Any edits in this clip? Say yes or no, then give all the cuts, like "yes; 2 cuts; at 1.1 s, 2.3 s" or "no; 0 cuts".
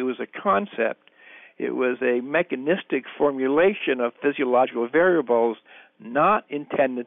no; 0 cuts